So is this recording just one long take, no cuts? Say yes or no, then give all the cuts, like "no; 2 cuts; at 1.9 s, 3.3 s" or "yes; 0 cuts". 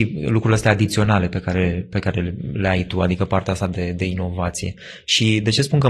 yes; 0 cuts